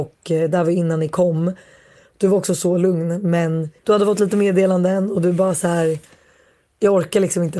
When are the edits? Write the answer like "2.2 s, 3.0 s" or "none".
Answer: 3.8 s